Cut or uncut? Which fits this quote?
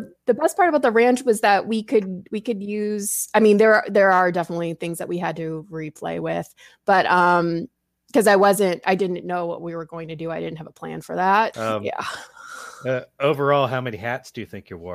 cut